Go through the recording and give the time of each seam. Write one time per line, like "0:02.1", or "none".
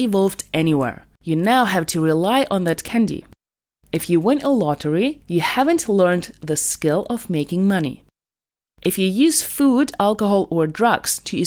0:01.1